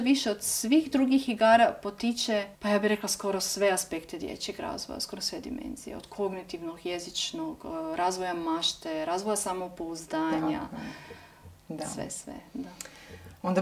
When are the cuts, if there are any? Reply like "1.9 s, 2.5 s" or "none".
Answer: 2.5 s